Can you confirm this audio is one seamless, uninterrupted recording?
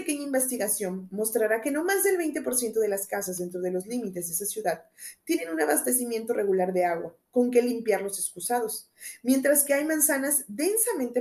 yes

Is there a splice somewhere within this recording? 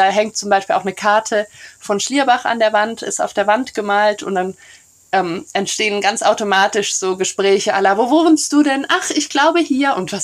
no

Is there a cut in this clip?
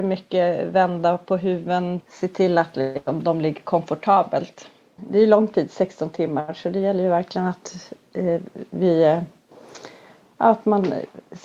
yes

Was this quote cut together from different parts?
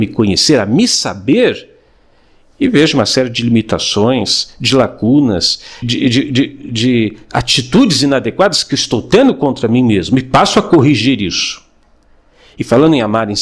yes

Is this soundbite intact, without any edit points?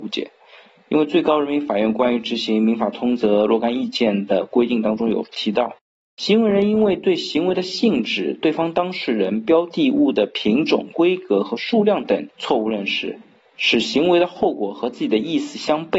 no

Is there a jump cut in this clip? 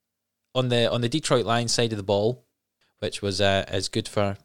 yes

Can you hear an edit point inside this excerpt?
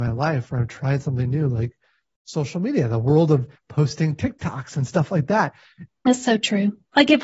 yes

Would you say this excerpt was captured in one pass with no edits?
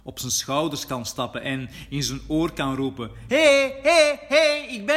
yes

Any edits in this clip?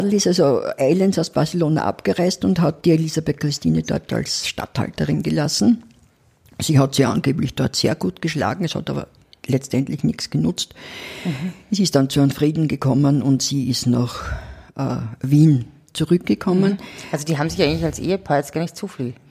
no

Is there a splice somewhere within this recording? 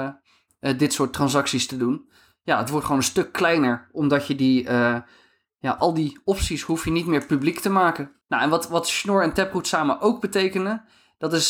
yes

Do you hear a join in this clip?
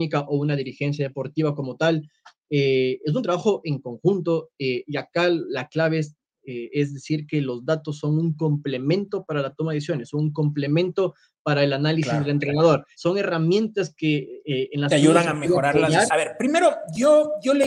yes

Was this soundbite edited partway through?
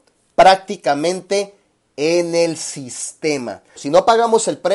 yes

